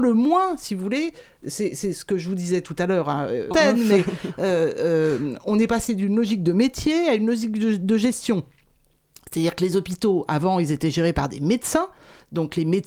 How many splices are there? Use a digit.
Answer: 1